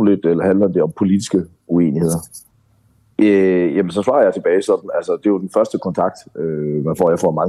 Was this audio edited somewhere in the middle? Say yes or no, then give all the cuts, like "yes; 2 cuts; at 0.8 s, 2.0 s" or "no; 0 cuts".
yes; 1 cut; at 3.1 s